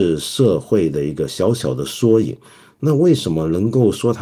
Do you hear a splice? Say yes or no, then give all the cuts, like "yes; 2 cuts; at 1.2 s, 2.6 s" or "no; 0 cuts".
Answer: no; 0 cuts